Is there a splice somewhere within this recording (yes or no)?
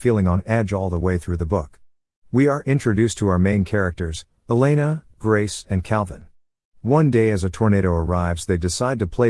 yes